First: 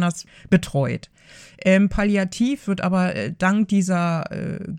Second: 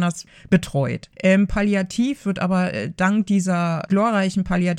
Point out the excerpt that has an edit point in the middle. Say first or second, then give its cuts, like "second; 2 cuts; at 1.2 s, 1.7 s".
second; 2 cuts; at 1.1 s, 3.9 s